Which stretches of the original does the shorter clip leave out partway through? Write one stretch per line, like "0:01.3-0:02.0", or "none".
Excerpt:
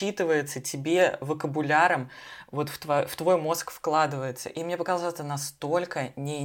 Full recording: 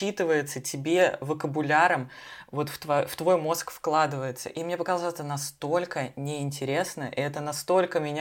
none